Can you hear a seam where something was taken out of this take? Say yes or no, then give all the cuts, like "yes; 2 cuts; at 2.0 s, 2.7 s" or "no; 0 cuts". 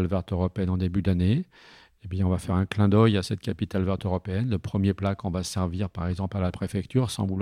no; 0 cuts